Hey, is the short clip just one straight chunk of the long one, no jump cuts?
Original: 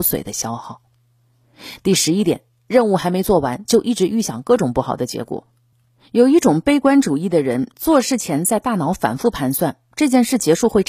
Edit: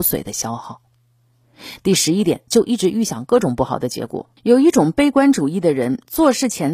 no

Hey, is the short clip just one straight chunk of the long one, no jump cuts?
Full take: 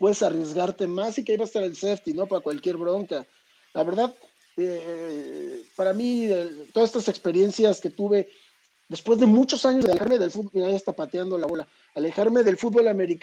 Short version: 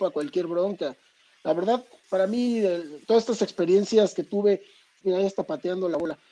no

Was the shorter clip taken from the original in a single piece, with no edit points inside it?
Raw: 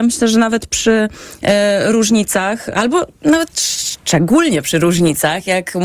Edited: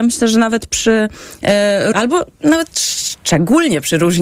no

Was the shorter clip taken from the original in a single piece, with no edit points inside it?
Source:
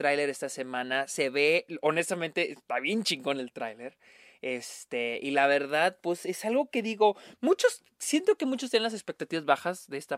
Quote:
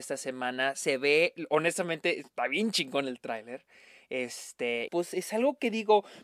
no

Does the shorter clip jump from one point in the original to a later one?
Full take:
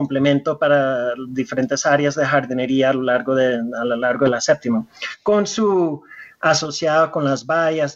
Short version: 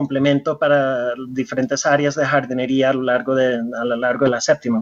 no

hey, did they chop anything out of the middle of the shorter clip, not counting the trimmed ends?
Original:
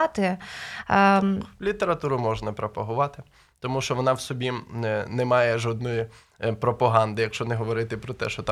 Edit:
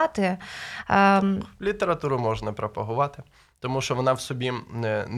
no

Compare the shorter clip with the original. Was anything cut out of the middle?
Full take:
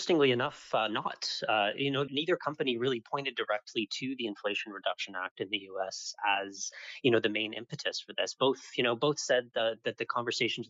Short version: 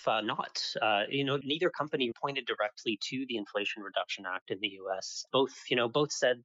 yes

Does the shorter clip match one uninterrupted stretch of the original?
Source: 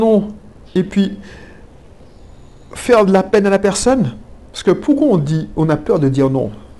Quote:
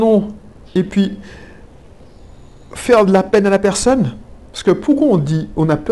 yes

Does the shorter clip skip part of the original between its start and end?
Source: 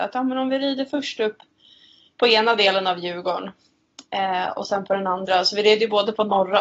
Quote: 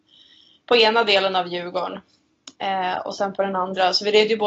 no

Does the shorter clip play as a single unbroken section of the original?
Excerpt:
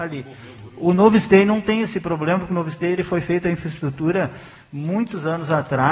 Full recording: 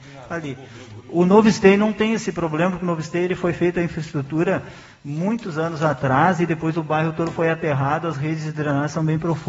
yes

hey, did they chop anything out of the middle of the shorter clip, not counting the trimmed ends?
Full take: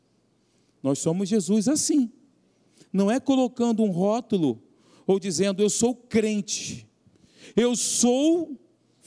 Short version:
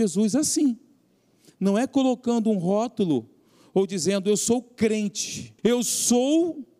yes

